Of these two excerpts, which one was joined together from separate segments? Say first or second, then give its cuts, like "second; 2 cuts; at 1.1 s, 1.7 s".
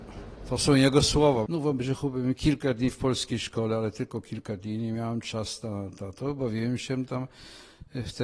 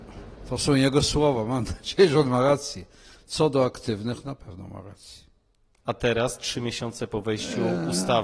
first; 1 cut; at 1.5 s